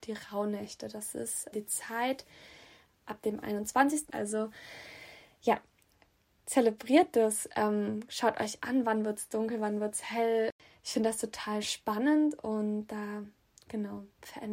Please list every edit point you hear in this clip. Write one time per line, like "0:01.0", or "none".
0:01.5
0:04.1